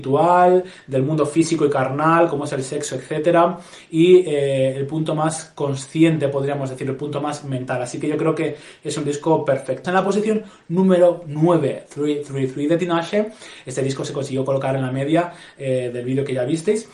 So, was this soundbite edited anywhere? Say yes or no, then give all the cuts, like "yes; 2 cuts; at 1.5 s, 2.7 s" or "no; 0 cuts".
yes; 1 cut; at 9.8 s